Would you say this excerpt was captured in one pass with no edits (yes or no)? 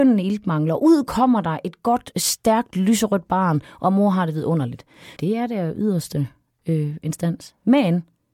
no